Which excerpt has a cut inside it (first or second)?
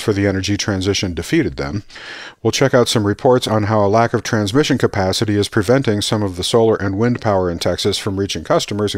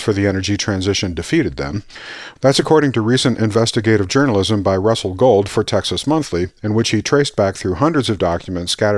second